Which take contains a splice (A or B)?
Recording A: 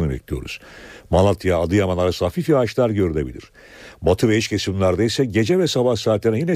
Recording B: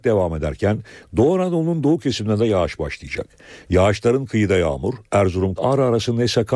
B